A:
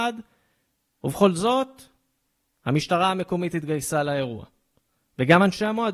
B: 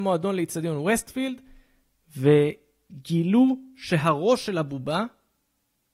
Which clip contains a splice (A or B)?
A